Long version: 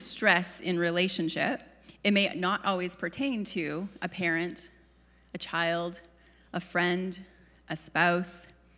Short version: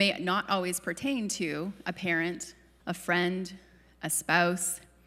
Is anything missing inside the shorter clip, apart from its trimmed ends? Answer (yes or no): yes